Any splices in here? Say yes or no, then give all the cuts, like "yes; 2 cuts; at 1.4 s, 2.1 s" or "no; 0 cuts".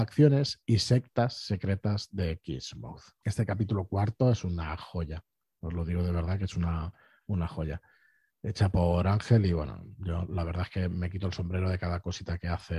yes; 1 cut; at 3.2 s